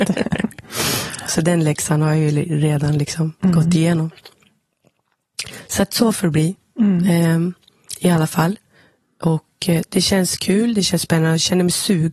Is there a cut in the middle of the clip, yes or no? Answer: no